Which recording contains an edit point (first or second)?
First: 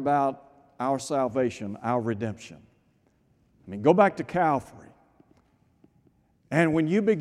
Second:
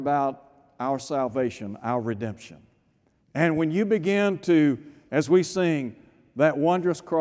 second